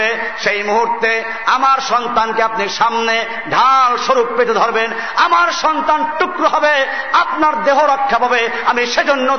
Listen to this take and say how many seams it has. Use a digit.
1